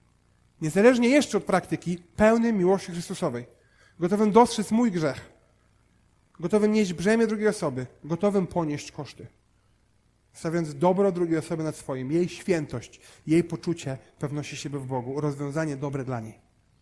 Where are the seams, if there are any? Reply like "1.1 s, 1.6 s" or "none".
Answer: none